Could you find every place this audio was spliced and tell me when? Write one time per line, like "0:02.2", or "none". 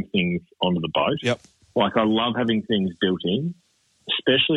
none